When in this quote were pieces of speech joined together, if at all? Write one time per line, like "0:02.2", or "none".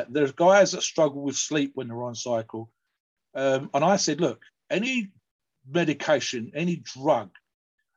0:06.5